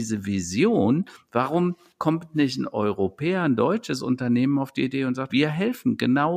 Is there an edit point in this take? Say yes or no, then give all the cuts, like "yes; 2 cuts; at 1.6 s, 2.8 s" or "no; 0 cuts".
yes; 1 cut; at 5.3 s